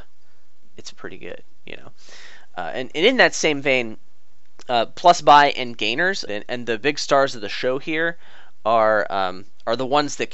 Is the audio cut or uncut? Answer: cut